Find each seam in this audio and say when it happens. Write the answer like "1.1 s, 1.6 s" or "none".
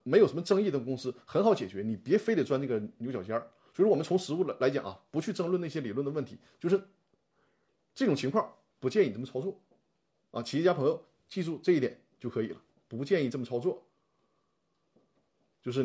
none